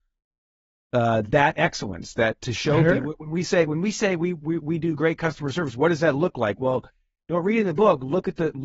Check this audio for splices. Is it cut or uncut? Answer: uncut